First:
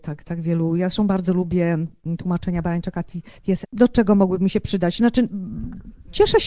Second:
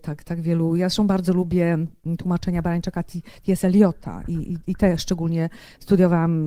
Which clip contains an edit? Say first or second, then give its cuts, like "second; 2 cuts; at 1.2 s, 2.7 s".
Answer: first; 1 cut; at 3.6 s